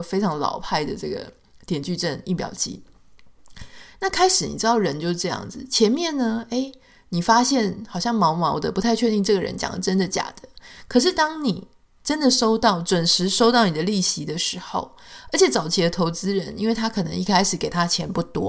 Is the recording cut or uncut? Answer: uncut